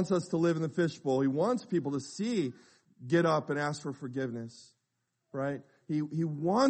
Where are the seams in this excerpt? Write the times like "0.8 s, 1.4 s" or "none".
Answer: 2.8 s

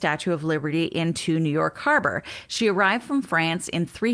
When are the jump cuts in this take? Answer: none

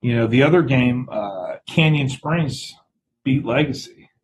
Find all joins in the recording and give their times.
none

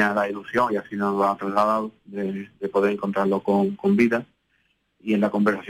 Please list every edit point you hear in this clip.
none

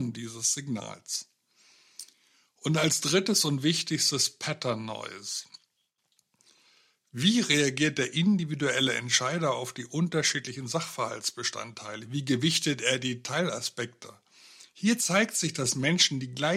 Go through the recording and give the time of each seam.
none

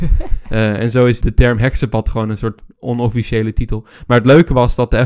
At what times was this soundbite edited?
1.2 s

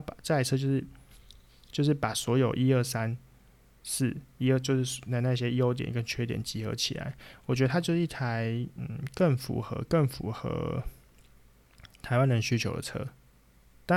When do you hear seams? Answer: none

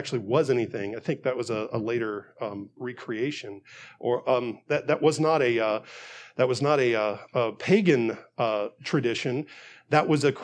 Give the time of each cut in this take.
none

